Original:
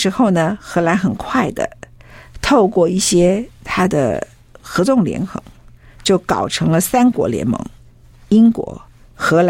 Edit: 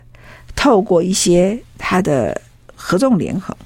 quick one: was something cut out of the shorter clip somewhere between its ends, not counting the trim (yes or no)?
no